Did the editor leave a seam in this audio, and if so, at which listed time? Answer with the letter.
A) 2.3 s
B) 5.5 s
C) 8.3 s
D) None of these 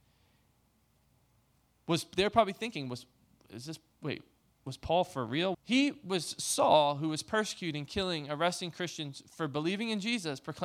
B